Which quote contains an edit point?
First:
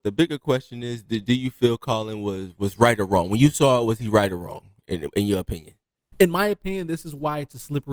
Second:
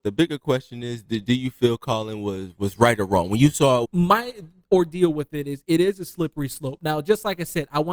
second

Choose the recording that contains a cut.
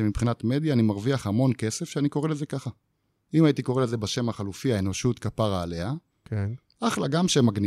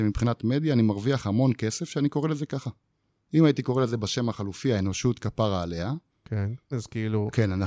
second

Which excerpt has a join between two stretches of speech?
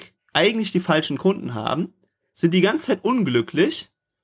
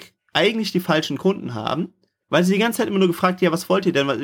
second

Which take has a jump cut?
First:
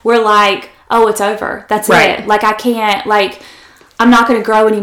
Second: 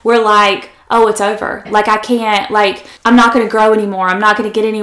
second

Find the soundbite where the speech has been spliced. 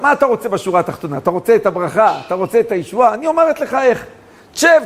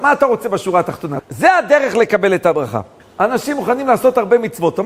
second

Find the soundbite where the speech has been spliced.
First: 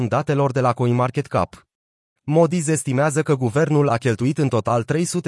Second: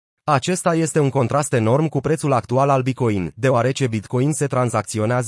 first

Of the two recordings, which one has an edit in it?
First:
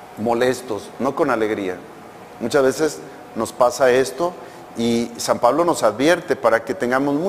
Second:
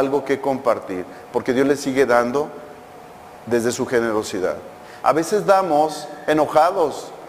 second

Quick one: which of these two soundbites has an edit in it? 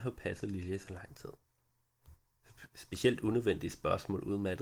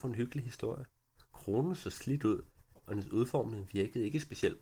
second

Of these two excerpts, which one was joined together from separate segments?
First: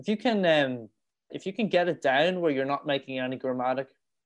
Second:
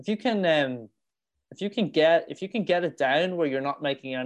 first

